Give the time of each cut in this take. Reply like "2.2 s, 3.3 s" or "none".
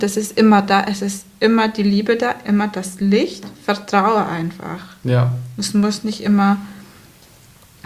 none